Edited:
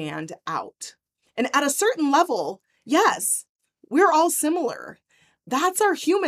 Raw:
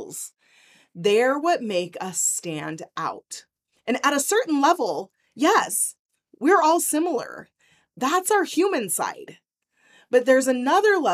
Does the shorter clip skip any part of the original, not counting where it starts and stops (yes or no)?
no